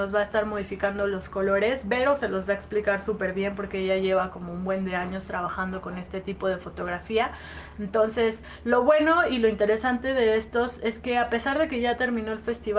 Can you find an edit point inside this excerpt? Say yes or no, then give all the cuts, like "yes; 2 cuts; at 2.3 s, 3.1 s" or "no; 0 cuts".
no; 0 cuts